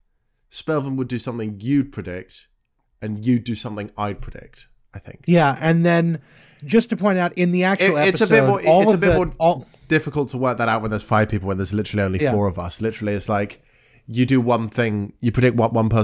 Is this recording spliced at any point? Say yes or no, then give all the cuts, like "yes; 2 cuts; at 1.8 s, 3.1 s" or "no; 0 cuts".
no; 0 cuts